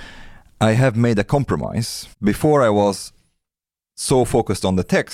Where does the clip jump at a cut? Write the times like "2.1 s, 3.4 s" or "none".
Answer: 2.1 s

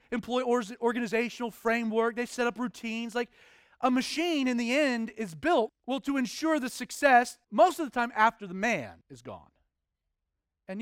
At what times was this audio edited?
5.7 s, 7.4 s, 9.0 s

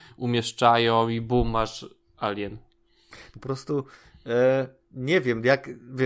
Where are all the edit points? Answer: 3.3 s, 4.8 s

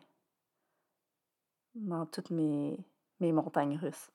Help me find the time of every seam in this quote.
none

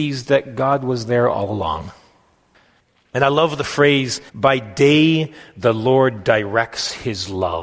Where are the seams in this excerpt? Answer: 4.3 s

